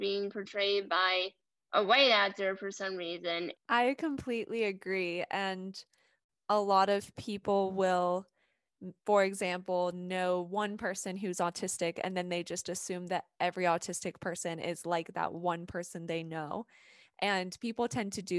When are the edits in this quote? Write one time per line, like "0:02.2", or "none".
0:03.5